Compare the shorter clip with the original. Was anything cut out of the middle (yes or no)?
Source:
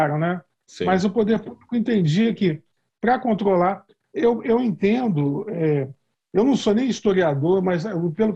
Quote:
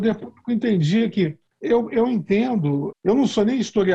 yes